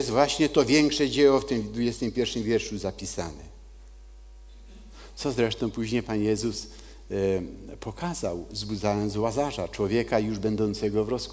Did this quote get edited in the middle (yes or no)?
no